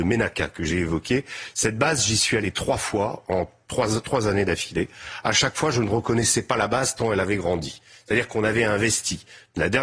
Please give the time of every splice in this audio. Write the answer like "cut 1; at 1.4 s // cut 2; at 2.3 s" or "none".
none